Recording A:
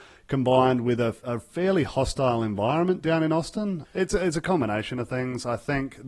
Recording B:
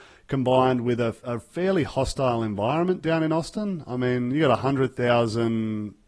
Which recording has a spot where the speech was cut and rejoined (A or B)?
A